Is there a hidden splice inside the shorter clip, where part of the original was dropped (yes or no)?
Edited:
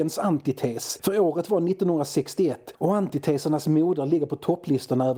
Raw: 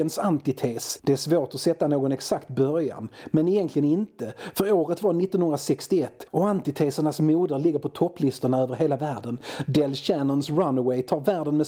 yes